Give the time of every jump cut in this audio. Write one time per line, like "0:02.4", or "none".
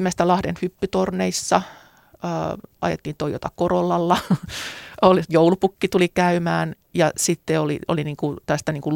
none

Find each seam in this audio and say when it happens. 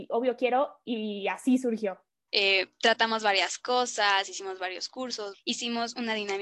0:02.3
0:05.3

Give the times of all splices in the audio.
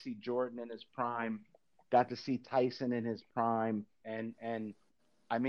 0:04.0

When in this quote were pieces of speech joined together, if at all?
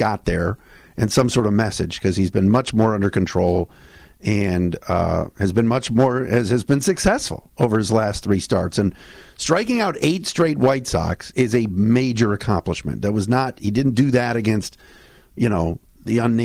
0:11.3

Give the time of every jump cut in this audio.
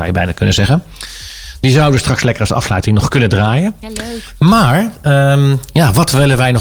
none

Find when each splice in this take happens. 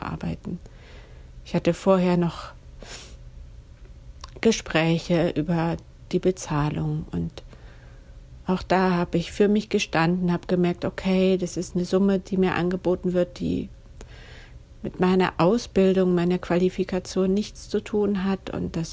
none

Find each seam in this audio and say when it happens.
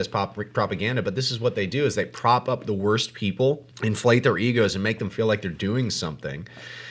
0:03.7

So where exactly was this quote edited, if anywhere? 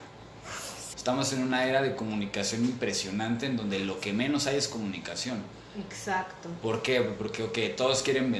0:00.9

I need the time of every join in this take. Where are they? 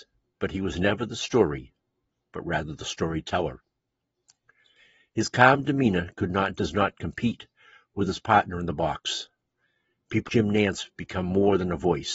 0:10.3

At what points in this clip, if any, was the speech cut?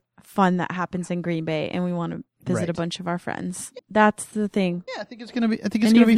0:03.8
0:04.9

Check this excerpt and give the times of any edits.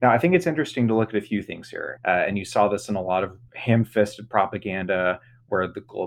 0:02.0

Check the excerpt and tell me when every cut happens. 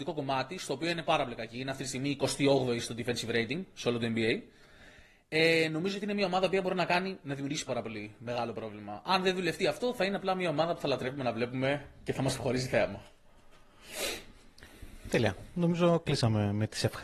0:07.7

